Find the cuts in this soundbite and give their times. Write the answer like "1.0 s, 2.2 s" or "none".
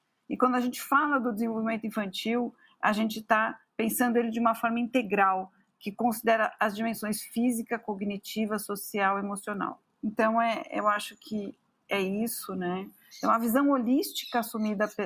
10.0 s, 13.1 s